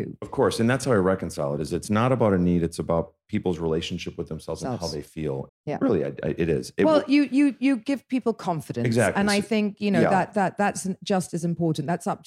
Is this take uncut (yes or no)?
no